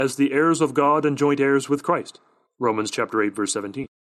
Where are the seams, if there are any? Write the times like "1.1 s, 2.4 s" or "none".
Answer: none

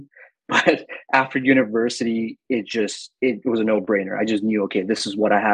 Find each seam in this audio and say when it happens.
none

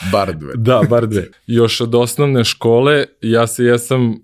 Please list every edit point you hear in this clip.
1.3 s

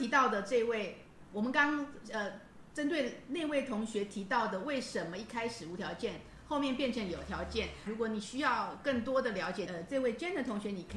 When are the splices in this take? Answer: 7.9 s, 9.7 s

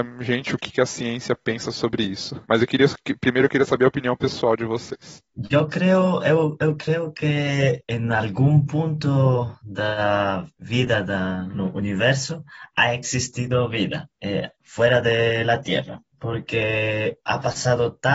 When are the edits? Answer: 5.3 s

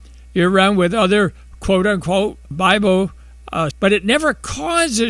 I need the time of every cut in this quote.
2.5 s, 3.7 s

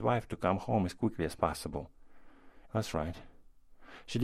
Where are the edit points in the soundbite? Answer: 2.6 s

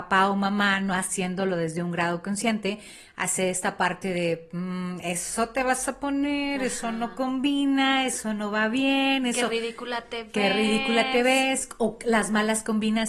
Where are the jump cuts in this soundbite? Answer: none

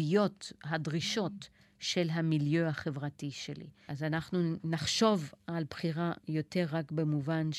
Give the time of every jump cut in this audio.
3.9 s

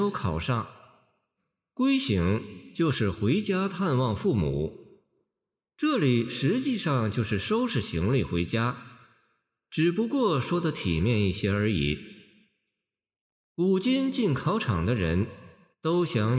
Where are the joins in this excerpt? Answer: none

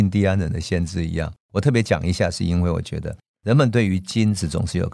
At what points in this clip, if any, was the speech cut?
1.4 s

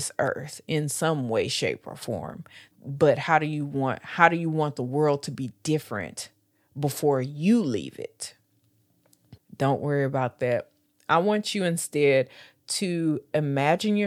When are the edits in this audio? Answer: 2.7 s, 9.4 s

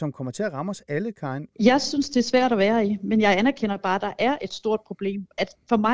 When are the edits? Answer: 1.5 s

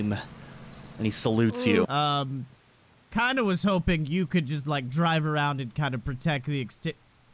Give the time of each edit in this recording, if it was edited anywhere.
1.8 s

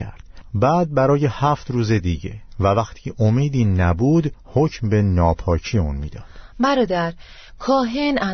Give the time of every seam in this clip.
none

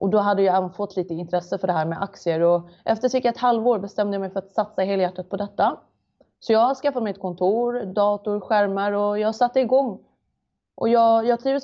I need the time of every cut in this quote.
none

